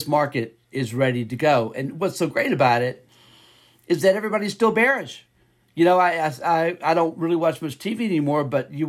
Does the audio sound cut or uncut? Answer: uncut